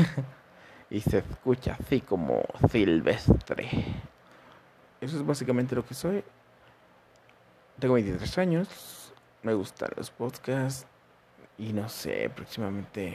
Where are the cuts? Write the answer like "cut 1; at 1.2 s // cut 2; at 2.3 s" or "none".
cut 1; at 4.9 s // cut 2; at 11.5 s